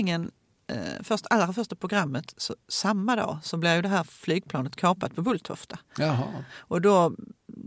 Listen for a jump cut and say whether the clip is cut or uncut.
uncut